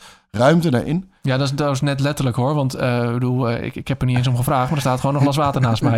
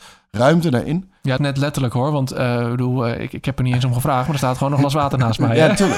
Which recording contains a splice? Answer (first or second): second